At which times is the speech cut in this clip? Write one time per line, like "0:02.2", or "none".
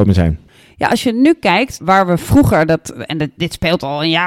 0:01.8